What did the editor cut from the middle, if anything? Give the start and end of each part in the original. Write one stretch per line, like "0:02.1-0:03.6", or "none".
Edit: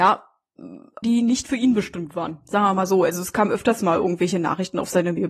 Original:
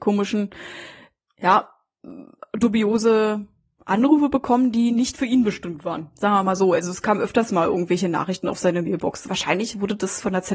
0:02.5-0:04.7